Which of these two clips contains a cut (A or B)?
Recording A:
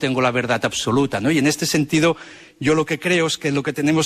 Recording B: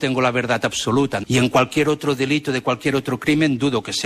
B